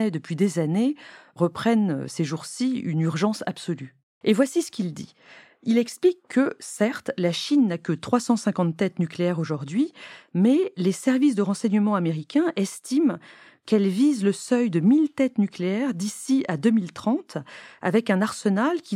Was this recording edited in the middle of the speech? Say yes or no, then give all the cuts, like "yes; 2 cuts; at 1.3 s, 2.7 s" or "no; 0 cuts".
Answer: yes; 1 cut; at 4.2 s